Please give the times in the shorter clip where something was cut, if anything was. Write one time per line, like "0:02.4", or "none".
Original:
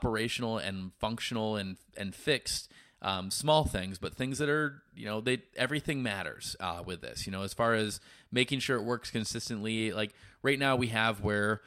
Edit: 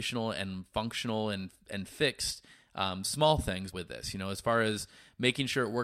0:03.7